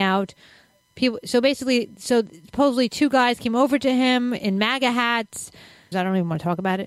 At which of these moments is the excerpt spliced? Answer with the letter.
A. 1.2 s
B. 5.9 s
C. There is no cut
B